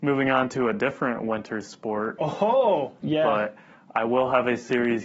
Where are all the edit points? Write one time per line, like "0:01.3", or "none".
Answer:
0:03.0